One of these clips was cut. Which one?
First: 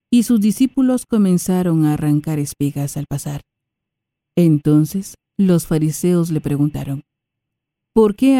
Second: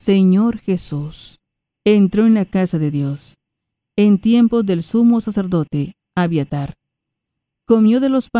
second; 1 cut; at 1.6 s

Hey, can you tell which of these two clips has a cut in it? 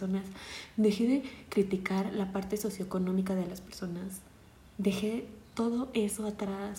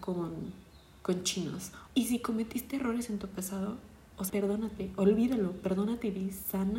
second; 2 cuts; at 1.9 s, 4.3 s

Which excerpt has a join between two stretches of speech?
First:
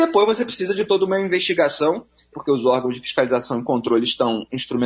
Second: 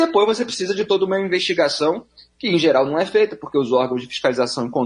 first; 1 cut; at 2.3 s

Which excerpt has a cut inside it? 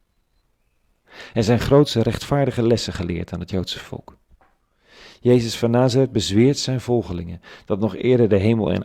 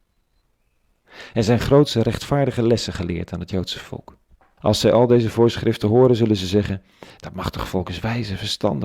second; 1 cut; at 4.6 s

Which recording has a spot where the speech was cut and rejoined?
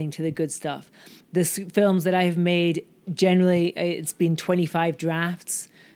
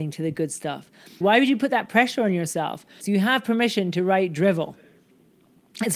second; 2 cuts; at 1.2 s, 3.0 s

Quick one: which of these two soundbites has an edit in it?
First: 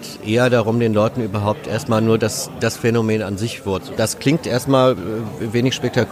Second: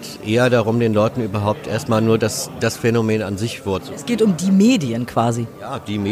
first; 1 cut; at 4.0 s

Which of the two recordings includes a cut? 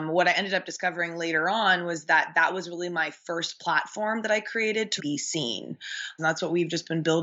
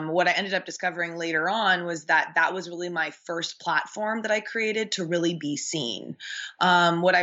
first; 2 cuts; at 5.0 s, 6.2 s

